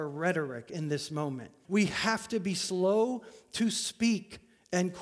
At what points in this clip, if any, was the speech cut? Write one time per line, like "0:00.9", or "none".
0:01.6